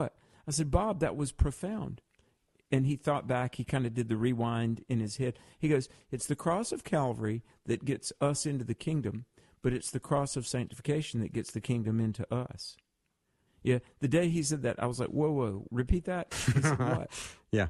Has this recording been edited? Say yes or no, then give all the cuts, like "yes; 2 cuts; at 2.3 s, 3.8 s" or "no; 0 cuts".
yes; 2 cuts; at 13.5 s, 15.7 s